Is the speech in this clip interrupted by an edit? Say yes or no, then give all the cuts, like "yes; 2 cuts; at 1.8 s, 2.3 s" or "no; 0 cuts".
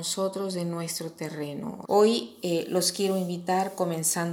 yes; 1 cut; at 1.8 s